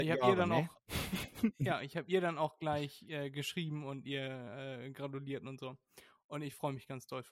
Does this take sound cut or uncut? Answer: uncut